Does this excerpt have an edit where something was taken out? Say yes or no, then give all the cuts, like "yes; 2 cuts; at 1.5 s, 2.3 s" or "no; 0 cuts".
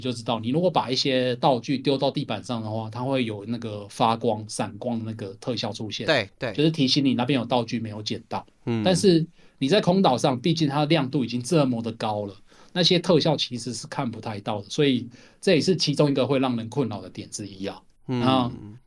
no; 0 cuts